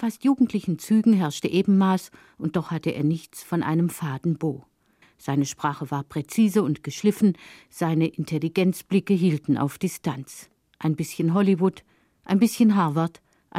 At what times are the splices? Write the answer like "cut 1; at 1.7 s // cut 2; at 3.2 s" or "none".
cut 1; at 5.0 s

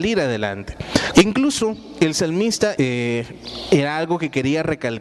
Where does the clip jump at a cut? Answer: cut 1; at 1.1 s // cut 2; at 2.8 s

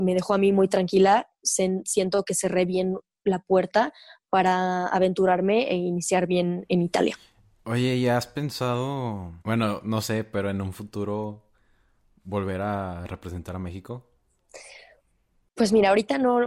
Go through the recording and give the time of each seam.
cut 1; at 9.4 s

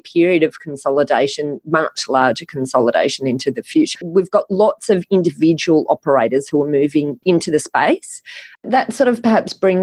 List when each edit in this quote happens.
cut 1; at 4.0 s // cut 2; at 8.6 s

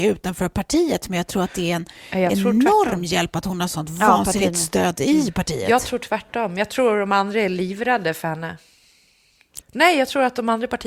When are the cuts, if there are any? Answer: cut 1; at 9.6 s

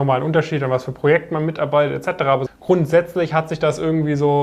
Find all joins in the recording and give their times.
cut 1; at 2.5 s

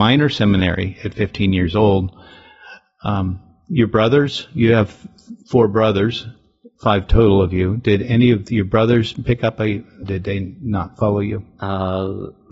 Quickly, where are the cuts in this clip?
cut 1; at 10.0 s

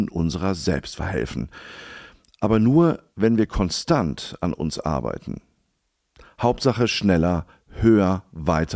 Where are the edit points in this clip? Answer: none

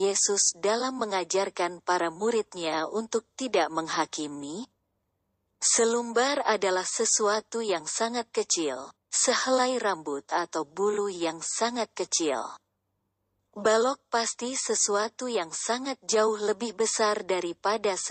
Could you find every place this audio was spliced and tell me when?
cut 1; at 9.0 s

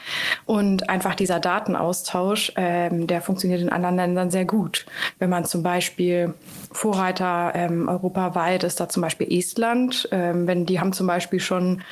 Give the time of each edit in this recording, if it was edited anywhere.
none

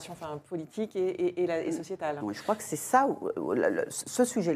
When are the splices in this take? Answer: cut 1; at 2.2 s

